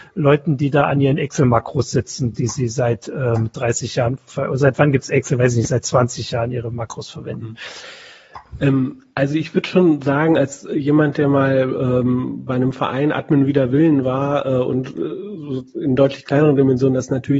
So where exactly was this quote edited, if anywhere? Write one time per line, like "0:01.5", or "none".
none